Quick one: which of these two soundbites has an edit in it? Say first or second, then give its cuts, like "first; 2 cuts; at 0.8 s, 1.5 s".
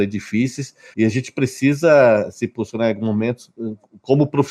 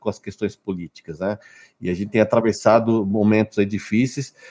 first; 1 cut; at 0.9 s